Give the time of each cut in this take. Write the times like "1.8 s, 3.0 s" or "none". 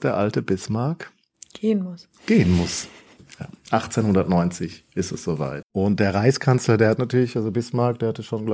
5.6 s

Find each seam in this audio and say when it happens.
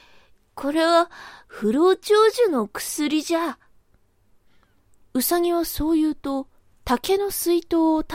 none

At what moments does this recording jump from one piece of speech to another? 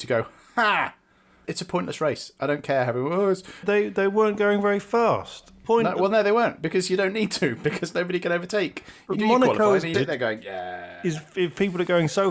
3.6 s, 9.9 s

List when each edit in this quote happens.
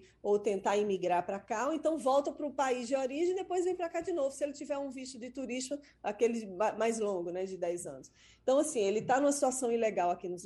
none

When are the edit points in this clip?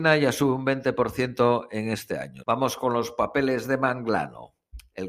2.4 s

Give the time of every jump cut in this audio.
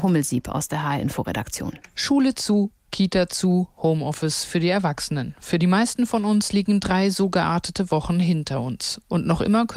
none

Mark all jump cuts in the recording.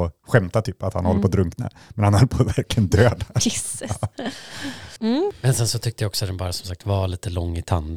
5.0 s

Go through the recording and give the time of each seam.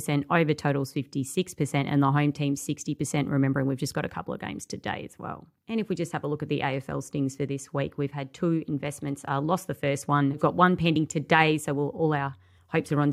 none

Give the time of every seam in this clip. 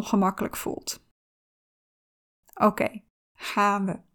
none

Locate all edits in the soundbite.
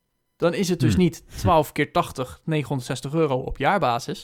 none

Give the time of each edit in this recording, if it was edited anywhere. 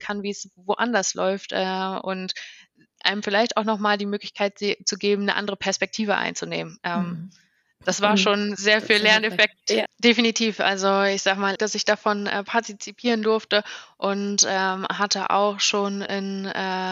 9.9 s, 11.6 s

